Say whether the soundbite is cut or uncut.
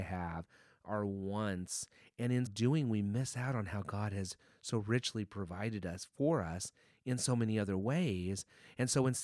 cut